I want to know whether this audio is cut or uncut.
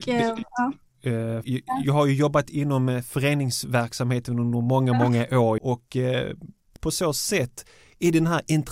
cut